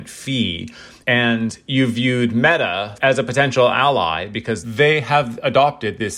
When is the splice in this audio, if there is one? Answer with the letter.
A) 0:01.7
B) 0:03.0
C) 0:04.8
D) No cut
B